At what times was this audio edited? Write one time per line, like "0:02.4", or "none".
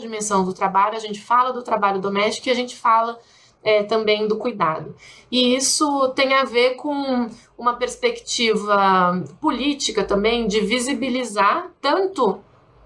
none